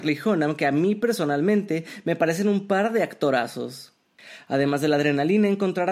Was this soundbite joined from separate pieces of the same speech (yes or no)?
no